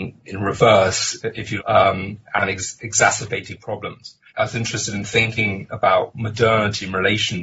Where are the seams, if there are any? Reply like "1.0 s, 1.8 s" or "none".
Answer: 1.6 s, 4.3 s

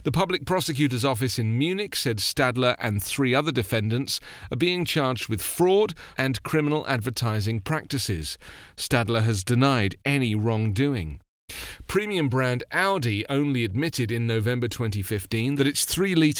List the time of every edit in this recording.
6.1 s

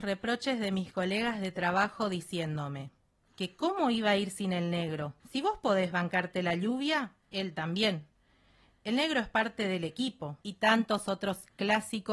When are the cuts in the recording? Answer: 5.2 s, 10.4 s

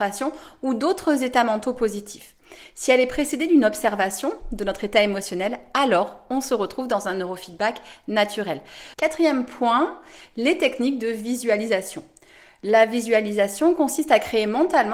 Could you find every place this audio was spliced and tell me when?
8.9 s

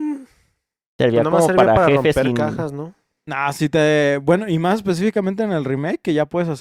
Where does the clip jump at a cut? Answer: none

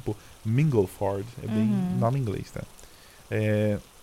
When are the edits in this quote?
none

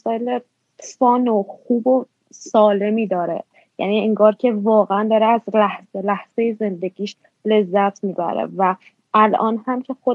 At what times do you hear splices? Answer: none

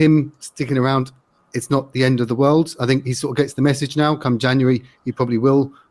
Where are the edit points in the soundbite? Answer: none

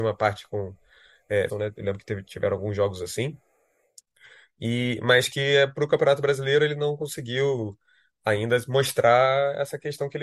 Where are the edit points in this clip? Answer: 1.5 s

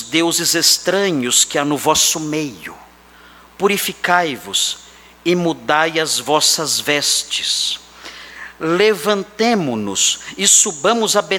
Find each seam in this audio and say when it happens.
none

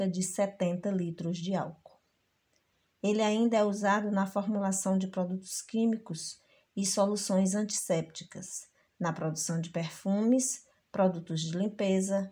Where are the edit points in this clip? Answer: none

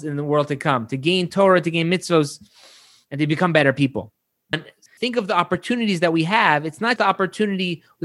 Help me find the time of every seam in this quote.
4.5 s, 7.0 s

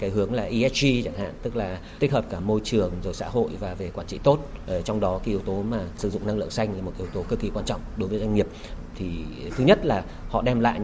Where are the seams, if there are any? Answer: none

